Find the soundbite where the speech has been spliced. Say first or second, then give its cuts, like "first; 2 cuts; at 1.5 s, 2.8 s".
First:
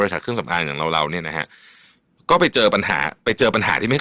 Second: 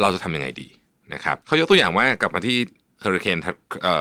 second; 1 cut; at 1.4 s